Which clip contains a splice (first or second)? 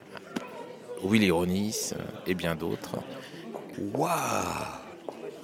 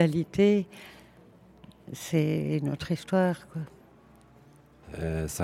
first